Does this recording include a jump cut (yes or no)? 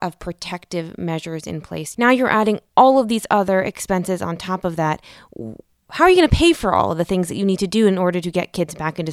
yes